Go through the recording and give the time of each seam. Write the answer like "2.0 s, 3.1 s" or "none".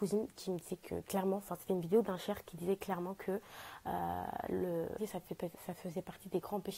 5.0 s